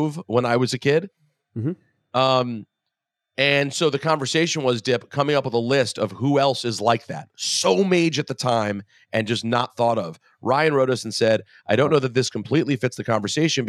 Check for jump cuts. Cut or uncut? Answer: uncut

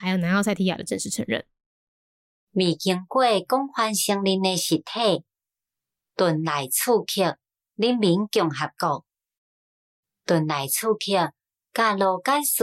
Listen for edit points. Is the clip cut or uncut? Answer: uncut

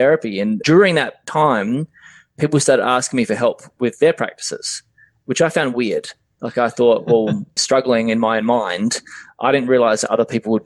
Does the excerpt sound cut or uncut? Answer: cut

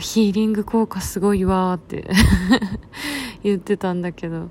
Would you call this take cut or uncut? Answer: uncut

